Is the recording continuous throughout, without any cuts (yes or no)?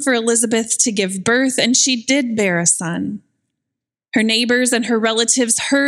yes